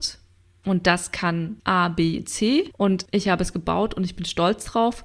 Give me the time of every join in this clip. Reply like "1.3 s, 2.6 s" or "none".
none